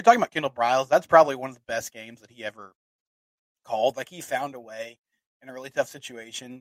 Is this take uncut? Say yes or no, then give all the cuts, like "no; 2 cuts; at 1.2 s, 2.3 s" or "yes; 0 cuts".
yes; 0 cuts